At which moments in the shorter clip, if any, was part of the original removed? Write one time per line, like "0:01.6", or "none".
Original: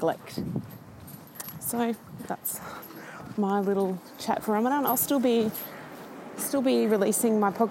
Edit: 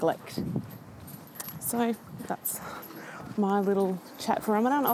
none